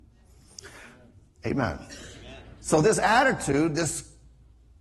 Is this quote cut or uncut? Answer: uncut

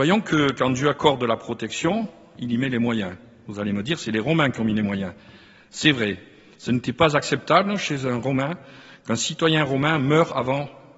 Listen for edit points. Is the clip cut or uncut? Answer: uncut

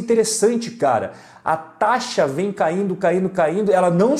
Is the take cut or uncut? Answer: uncut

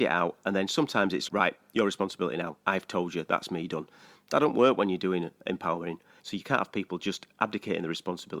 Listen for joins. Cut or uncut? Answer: cut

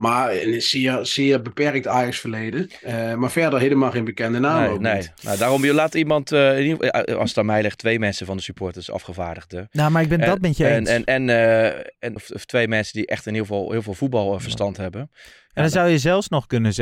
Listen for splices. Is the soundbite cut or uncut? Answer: cut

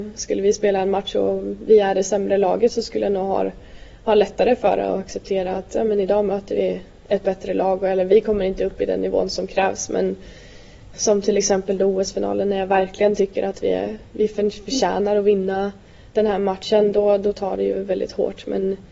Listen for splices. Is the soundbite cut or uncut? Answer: cut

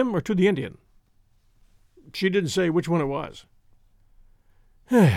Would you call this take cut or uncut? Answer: uncut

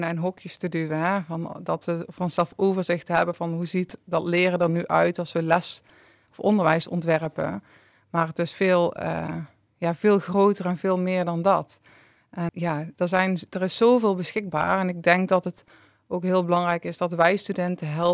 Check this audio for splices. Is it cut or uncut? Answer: cut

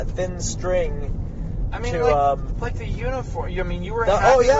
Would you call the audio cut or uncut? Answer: uncut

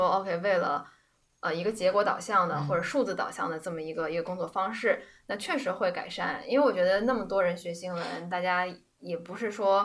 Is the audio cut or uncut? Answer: uncut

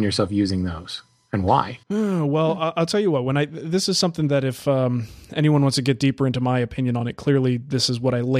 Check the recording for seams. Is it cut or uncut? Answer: cut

